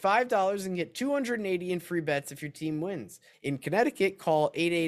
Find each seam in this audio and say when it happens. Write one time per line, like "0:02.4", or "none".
0:03.3